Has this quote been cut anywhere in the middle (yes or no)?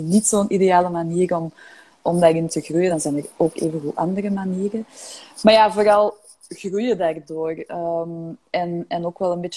no